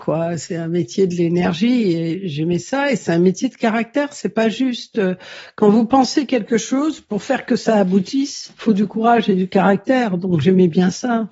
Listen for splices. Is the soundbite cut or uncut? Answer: uncut